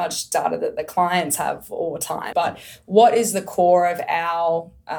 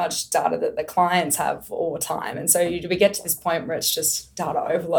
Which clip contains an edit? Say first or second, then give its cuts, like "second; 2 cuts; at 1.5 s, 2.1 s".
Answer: first; 1 cut; at 2.3 s